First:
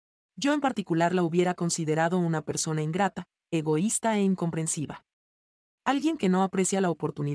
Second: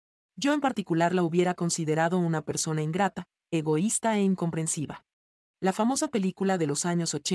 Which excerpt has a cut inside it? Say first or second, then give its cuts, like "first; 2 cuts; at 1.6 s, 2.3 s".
second; 1 cut; at 5.5 s